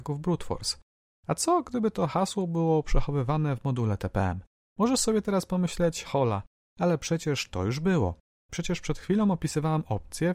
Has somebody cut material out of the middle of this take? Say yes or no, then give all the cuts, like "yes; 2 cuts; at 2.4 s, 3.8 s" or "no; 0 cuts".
yes; 1 cut; at 6.0 s